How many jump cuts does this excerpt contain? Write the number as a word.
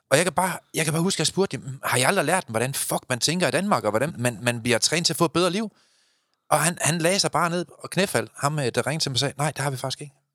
one